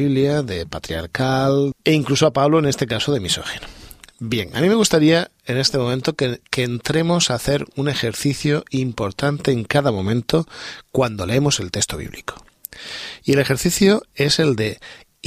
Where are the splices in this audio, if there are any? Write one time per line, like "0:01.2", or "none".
0:01.7